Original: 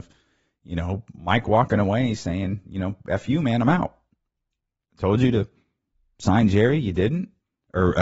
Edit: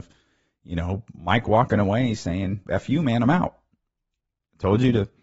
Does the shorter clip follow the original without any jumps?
no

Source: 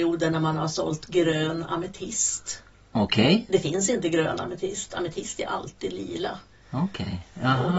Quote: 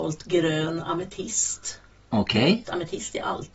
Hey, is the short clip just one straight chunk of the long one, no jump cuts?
no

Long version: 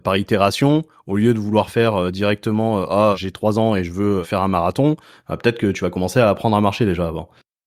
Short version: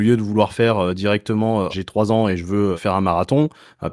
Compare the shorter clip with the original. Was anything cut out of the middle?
yes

